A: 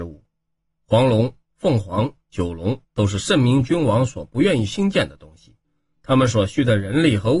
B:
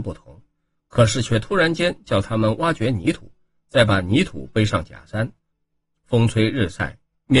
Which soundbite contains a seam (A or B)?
A